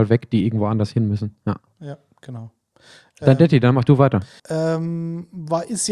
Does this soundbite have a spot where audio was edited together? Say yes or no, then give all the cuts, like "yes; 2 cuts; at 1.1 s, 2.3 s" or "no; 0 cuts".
yes; 1 cut; at 4.4 s